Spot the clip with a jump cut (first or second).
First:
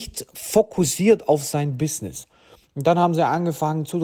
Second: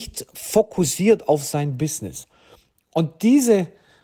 first